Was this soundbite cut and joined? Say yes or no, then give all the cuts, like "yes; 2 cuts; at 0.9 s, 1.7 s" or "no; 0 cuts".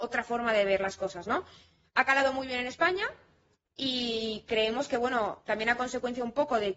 no; 0 cuts